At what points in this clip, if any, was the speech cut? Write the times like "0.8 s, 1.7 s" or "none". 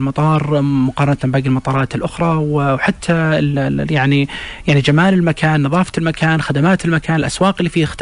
3.5 s